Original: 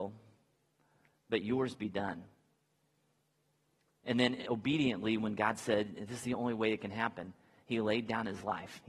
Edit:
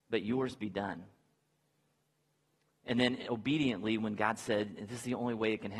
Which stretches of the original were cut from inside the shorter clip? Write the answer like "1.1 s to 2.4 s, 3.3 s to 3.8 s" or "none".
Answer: none

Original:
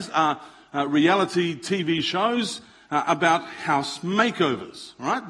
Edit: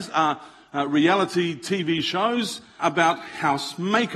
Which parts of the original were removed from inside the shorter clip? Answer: 2.8 s to 3.0 s

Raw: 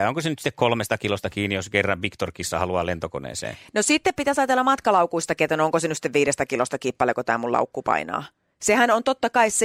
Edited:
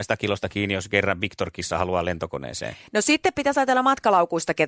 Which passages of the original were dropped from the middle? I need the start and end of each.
none

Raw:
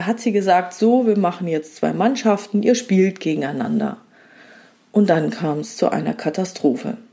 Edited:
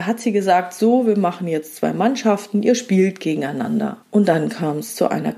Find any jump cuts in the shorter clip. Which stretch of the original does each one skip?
4.0 s to 4.8 s

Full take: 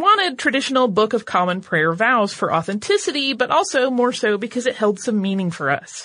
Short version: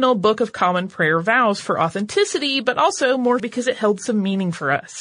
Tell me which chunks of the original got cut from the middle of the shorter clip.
4.1 s to 4.4 s

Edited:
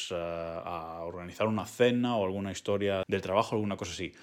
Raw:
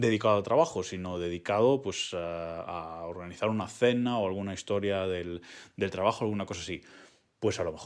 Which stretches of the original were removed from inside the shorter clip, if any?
5.1 s to 5.7 s

